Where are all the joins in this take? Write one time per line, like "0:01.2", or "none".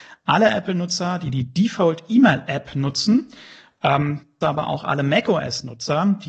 0:04.4